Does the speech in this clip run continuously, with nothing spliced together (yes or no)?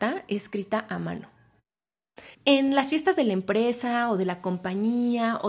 no